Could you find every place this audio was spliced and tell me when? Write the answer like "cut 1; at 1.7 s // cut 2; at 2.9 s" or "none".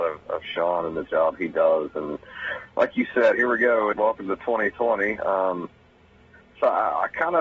cut 1; at 3.9 s